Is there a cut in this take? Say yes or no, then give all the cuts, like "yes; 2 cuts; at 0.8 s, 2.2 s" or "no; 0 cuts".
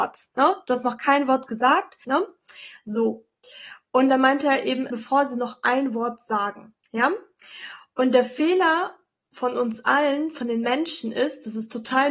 yes; 3 cuts; at 2.0 s, 4.9 s, 6.8 s